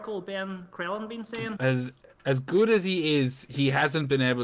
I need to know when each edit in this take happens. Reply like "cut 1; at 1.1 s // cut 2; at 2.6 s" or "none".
cut 1; at 1.6 s